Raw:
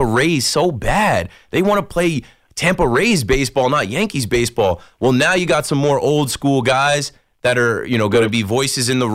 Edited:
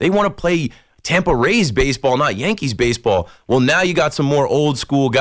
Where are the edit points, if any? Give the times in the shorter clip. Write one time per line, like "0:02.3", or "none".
none